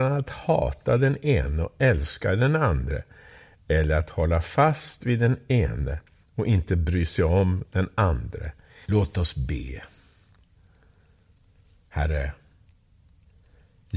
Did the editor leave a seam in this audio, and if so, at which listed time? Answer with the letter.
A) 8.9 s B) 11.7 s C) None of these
A